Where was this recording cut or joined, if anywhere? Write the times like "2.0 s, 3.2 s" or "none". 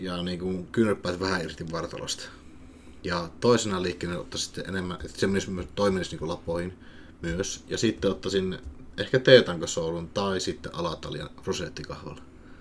none